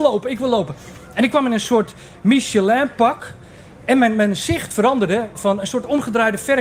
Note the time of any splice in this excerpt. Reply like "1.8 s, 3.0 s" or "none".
5.4 s